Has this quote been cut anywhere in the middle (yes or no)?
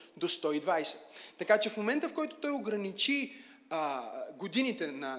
no